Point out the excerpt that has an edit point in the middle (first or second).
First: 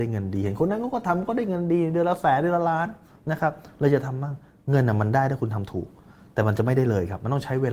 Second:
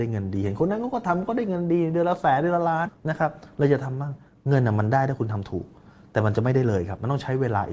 second